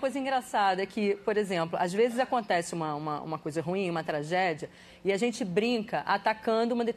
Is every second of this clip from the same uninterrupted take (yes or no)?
yes